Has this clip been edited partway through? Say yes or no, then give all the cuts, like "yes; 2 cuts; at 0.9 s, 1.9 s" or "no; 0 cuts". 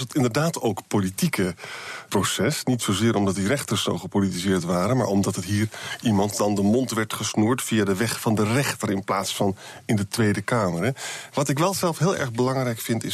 yes; 1 cut; at 2.1 s